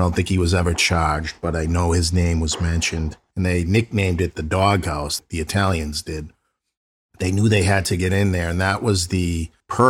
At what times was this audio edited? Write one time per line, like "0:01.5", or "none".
0:03.3